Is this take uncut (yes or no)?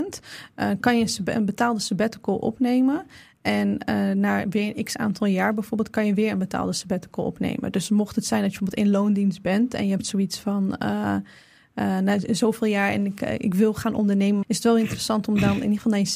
no